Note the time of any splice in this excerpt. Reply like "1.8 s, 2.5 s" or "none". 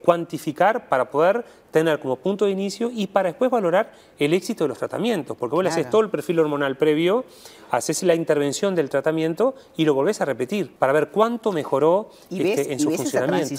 10.8 s